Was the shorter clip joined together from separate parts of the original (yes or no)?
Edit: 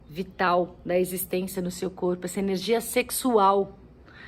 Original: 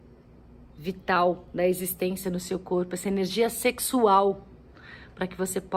no